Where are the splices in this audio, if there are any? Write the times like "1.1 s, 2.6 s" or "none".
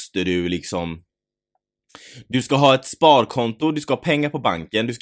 none